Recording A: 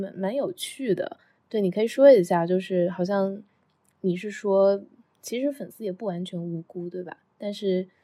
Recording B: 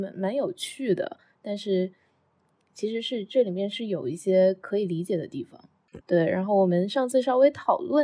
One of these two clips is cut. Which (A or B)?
B